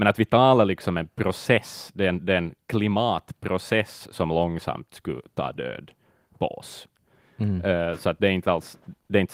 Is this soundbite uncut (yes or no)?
yes